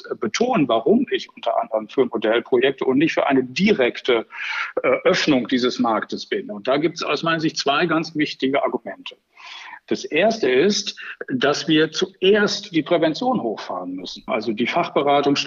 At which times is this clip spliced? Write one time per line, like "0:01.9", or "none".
0:14.3

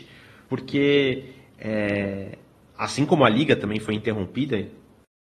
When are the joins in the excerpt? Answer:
none

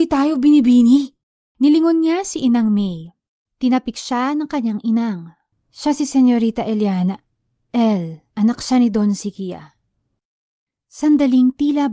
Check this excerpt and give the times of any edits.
0:03.5
0:08.3

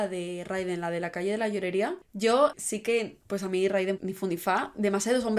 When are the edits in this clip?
0:02.5
0:04.0

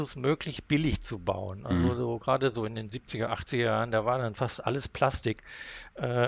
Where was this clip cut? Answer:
none

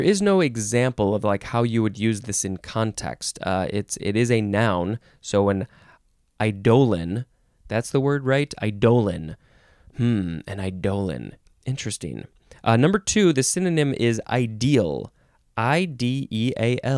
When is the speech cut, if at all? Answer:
none

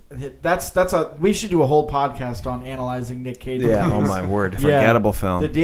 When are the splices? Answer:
0:04.6

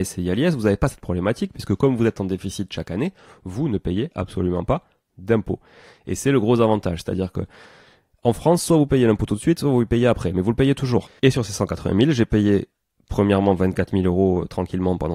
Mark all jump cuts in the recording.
0:11.1

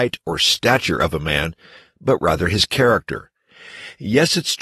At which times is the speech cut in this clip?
none

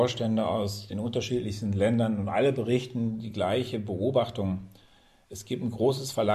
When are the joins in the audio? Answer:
none

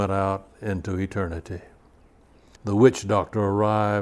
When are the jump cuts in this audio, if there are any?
0:02.6

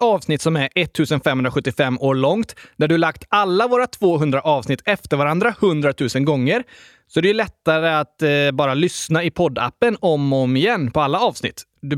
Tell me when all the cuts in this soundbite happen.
none

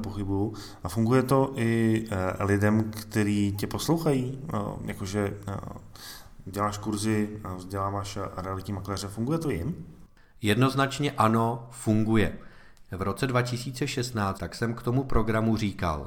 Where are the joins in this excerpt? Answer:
0:12.8
0:14.4

